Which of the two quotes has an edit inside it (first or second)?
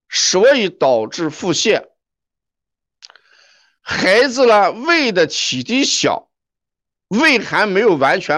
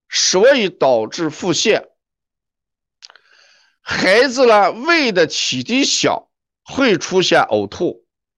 second